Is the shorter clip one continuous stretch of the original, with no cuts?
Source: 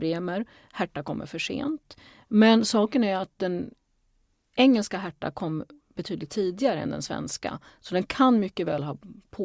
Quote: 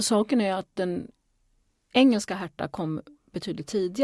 yes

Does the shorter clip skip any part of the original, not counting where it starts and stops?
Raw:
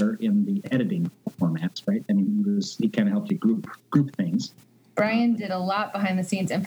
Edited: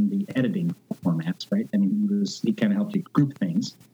yes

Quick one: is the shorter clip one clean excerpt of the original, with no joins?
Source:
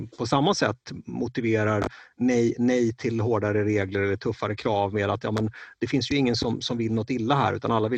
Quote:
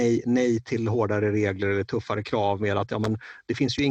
yes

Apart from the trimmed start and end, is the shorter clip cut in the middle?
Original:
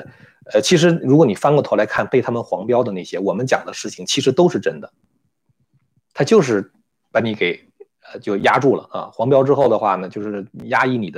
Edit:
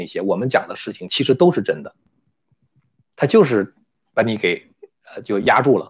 no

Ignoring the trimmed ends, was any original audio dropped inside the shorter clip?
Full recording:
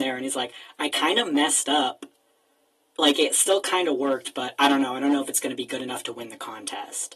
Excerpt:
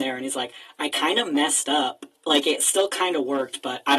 yes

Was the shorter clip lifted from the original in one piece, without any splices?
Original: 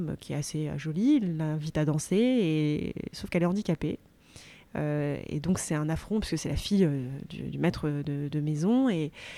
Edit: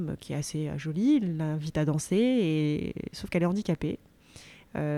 yes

